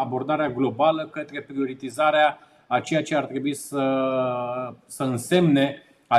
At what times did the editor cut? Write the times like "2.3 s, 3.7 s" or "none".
none